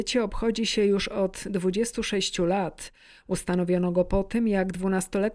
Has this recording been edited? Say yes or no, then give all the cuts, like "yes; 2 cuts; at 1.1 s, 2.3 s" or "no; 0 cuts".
no; 0 cuts